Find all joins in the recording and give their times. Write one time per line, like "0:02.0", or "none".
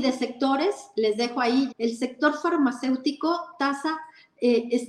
0:01.7